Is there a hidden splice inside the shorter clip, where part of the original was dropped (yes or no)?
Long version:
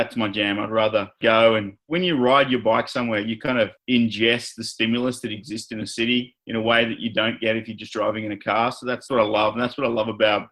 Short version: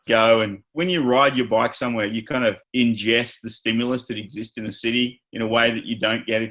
no